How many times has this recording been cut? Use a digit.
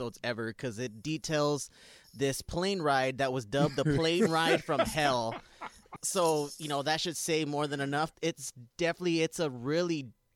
2